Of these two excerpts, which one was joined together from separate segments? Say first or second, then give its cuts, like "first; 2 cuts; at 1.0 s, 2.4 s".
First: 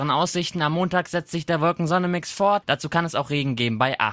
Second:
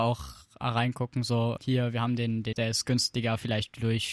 second; 1 cut; at 2.5 s